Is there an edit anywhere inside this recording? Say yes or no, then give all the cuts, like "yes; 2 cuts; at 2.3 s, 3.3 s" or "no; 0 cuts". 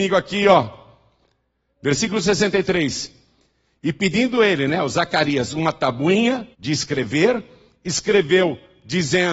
yes; 1 cut; at 6.5 s